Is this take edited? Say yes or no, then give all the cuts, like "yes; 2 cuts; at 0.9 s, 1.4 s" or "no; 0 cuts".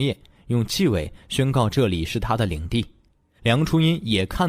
yes; 1 cut; at 3.4 s